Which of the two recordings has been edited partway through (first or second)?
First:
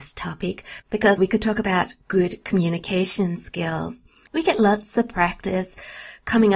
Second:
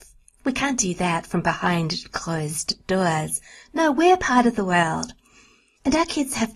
first